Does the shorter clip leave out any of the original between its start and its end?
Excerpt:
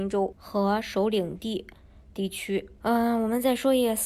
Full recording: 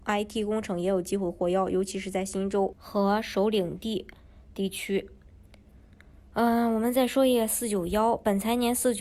yes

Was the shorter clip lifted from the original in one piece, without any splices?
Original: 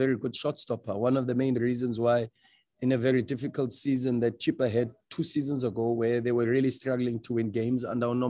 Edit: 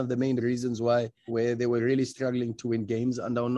no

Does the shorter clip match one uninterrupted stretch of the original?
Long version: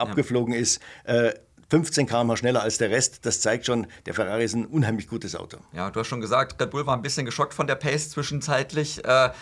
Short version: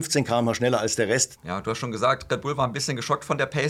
no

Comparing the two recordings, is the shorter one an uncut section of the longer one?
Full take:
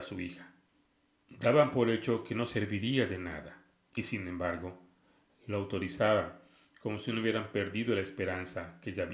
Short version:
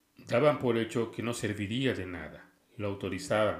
no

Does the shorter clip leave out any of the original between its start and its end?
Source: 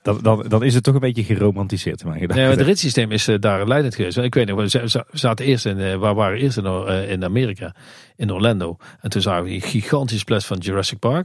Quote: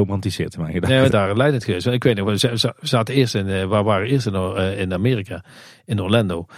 yes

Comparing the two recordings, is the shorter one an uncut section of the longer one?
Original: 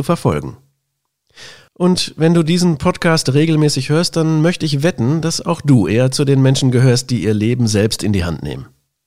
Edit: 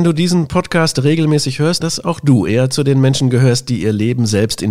no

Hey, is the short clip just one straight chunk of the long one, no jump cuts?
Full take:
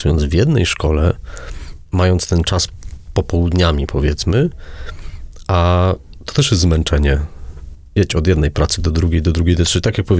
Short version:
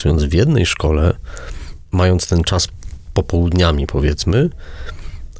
yes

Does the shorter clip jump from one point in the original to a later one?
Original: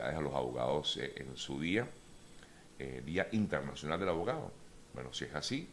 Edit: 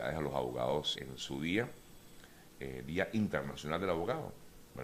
yes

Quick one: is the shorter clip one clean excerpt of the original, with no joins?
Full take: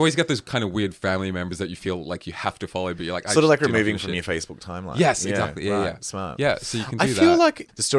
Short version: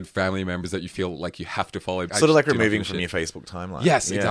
no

